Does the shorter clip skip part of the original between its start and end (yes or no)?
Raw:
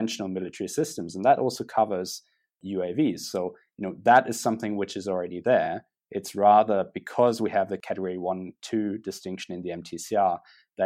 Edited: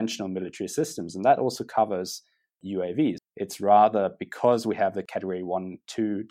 yes